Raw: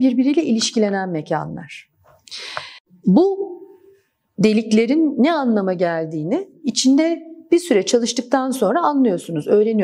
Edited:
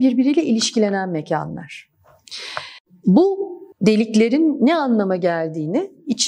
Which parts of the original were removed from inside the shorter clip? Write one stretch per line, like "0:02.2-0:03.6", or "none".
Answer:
0:03.7-0:04.3